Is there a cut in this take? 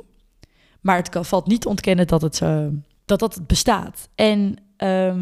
no; 0 cuts

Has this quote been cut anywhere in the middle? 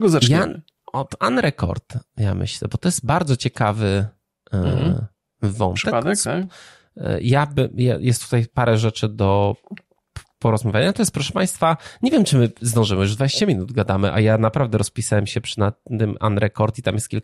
no; 0 cuts

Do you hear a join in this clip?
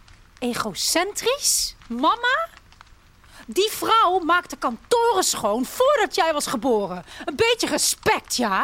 yes; 1 cut; at 1.8 s

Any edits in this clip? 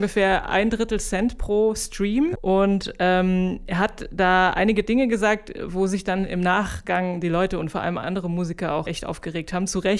yes; 2 cuts; at 2.4 s, 8.9 s

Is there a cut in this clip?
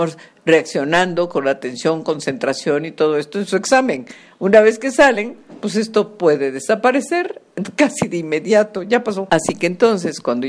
no; 0 cuts

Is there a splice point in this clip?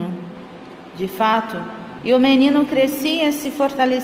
yes; 1 cut; at 2.0 s

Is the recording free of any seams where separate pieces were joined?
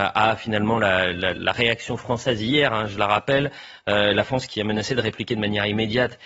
yes; 0 cuts

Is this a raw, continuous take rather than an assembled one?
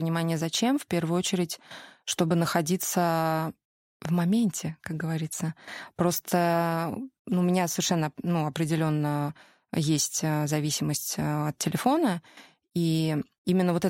yes; 0 cuts

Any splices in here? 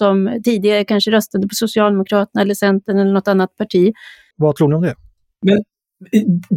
yes; 1 cut; at 4.3 s

